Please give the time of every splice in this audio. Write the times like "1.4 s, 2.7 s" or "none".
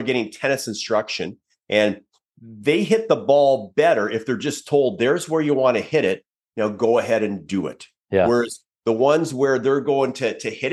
none